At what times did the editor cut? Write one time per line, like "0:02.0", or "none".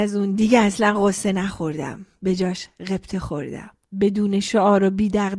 0:03.9